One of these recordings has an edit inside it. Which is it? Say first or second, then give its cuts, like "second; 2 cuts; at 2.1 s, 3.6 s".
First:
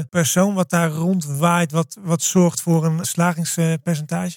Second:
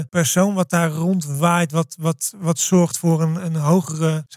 first; 2 cuts; at 2.0 s, 3.0 s